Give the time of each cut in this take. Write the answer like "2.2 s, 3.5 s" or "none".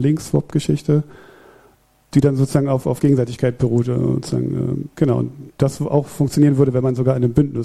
none